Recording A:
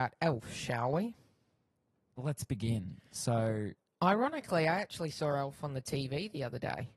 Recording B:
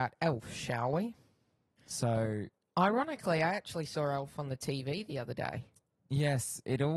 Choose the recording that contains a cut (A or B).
B